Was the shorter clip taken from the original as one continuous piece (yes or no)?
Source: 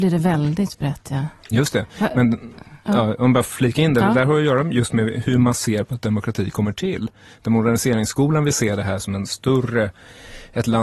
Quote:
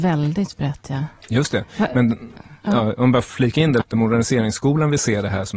no